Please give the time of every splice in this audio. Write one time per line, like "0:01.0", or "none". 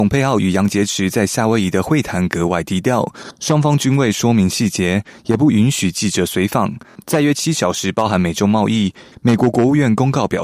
0:09.1